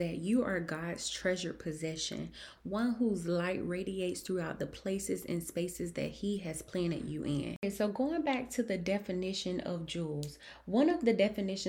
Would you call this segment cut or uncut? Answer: uncut